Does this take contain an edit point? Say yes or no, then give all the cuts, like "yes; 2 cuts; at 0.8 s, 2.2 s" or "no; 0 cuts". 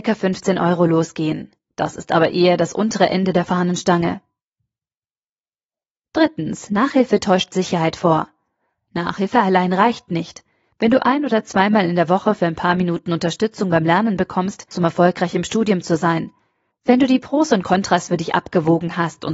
yes; 2 cuts; at 14.7 s, 16.7 s